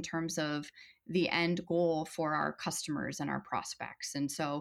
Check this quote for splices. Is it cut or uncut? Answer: uncut